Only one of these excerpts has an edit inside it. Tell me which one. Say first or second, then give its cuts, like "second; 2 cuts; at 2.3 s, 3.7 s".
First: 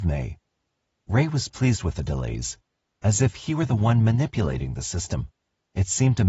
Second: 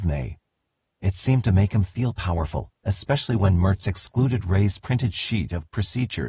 second; 2 cuts; at 0.9 s, 2.8 s